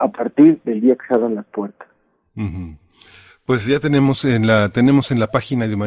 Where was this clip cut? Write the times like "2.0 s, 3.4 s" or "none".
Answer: none